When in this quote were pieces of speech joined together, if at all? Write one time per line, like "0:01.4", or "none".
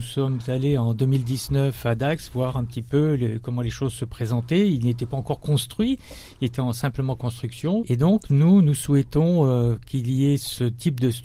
0:07.8